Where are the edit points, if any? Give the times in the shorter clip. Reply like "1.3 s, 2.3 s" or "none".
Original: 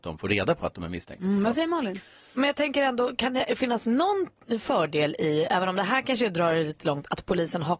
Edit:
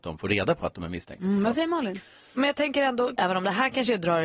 3.2 s

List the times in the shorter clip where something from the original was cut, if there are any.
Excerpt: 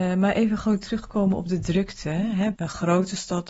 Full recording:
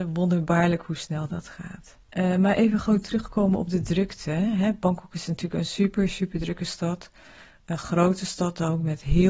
2.5 s

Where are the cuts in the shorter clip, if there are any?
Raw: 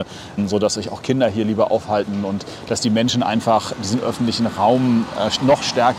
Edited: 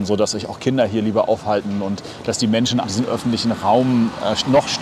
2.8 s

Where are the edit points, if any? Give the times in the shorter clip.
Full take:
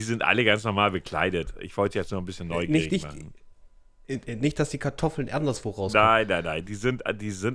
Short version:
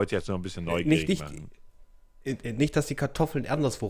none

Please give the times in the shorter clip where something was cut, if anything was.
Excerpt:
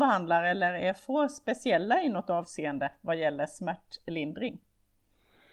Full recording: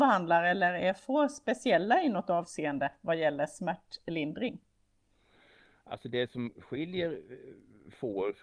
none

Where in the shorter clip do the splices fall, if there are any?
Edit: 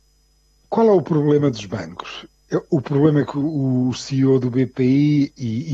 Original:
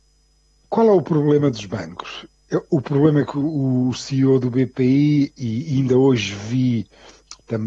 none

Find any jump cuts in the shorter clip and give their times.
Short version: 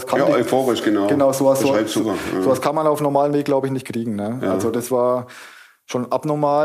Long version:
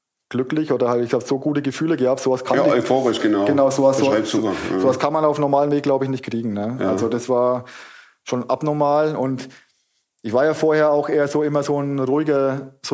none

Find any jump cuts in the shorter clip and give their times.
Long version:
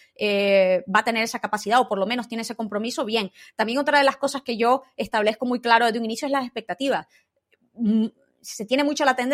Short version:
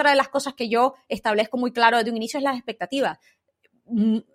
none

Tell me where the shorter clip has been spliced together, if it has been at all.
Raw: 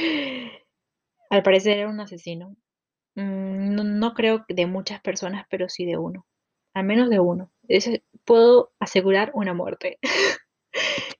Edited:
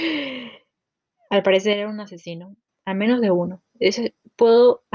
2.7 s

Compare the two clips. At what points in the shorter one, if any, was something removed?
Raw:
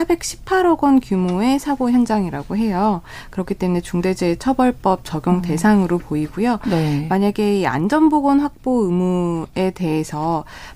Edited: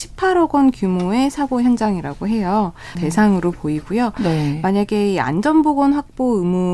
3.0 s

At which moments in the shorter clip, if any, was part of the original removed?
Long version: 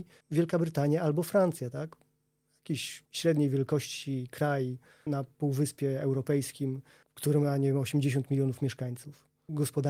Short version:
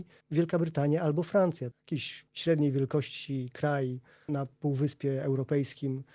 1.7 s

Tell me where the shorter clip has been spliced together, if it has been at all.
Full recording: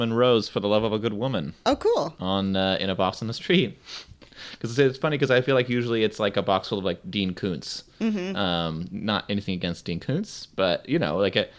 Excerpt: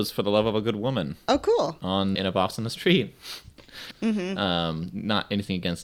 2.2 s, 3.9 s

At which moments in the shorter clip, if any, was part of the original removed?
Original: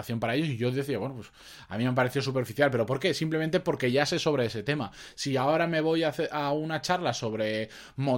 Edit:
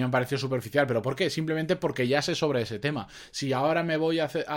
none

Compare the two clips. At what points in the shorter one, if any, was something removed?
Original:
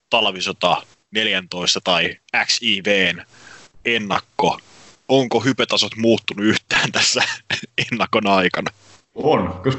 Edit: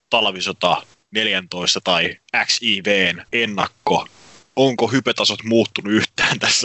3.3 s

